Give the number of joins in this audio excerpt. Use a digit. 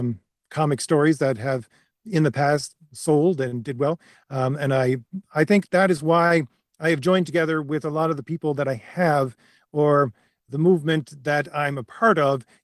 2